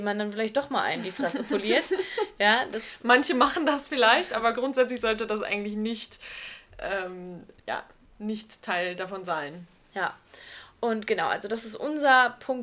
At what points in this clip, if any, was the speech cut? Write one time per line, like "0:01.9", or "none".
0:07.6

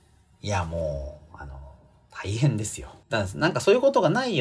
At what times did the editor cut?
0:03.0

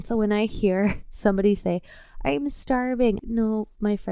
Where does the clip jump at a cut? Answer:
0:03.2

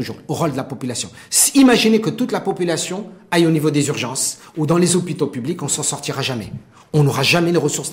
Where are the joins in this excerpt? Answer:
none

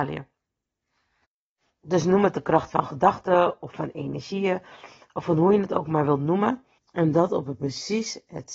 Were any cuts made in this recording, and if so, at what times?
0:06.8

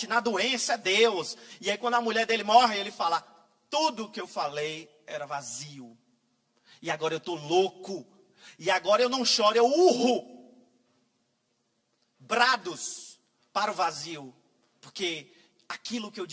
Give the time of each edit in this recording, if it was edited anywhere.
none

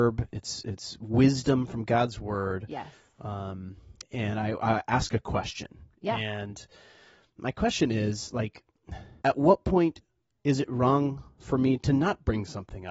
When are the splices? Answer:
0:04.0
0:09.2

